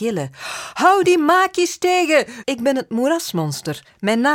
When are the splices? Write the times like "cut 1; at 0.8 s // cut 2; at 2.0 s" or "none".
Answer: cut 1; at 2.4 s